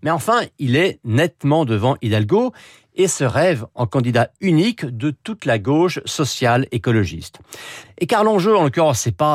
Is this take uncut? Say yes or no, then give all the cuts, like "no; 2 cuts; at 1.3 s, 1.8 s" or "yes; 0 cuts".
no; 1 cut; at 7.8 s